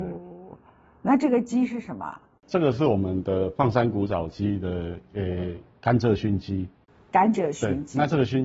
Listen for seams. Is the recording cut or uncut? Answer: uncut